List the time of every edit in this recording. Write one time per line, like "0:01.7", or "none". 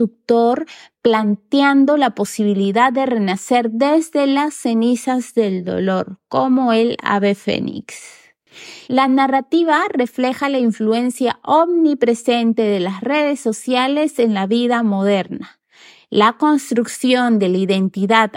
0:08.8